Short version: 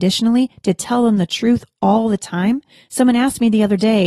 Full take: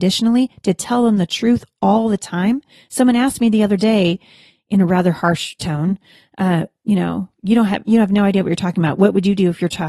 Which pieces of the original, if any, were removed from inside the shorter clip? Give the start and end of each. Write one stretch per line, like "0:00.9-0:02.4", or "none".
none